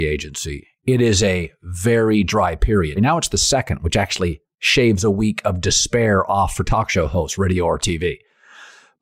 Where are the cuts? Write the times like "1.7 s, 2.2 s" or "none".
3.0 s

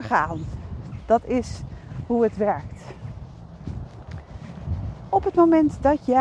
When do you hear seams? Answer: none

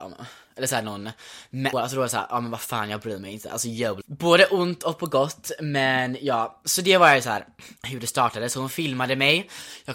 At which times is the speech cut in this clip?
1.7 s, 4.0 s, 7.8 s

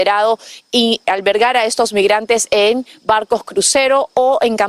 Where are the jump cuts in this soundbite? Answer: 1.0 s

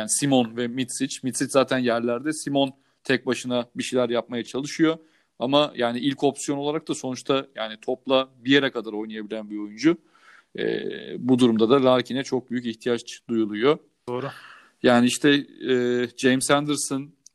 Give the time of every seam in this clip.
14.1 s

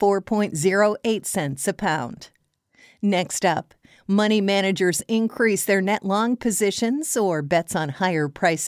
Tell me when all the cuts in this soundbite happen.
none

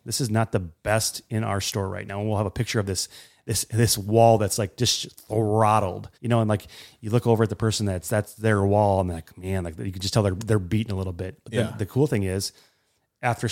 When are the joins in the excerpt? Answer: 6.1 s

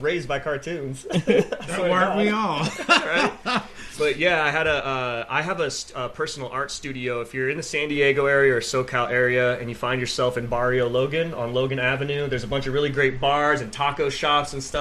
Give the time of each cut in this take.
none

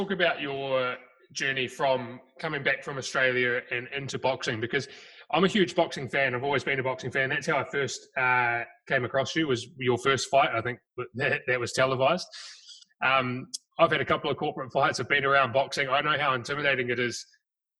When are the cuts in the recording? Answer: 13.7 s

